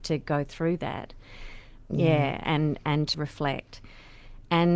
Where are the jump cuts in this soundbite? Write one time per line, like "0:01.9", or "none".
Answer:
0:01.9
0:03.1